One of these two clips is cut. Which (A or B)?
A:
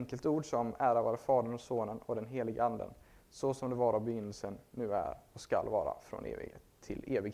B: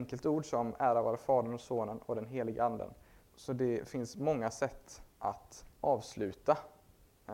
B